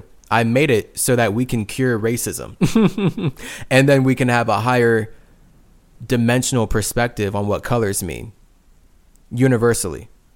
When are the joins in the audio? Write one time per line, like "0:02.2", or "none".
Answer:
none